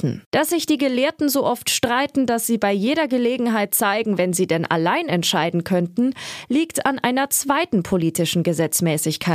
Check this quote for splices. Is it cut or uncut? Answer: cut